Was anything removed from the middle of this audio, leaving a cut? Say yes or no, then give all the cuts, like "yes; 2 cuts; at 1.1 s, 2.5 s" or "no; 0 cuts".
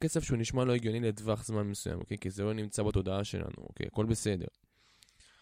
no; 0 cuts